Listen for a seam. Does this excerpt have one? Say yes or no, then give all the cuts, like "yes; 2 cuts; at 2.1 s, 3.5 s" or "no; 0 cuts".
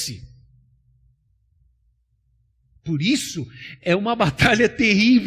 no; 0 cuts